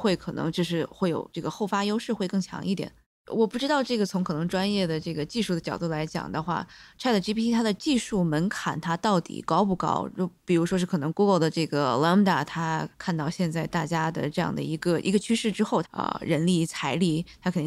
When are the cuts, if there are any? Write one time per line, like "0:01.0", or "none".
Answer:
0:03.2
0:12.9
0:15.8